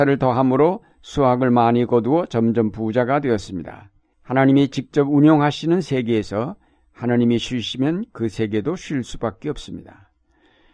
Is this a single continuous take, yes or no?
no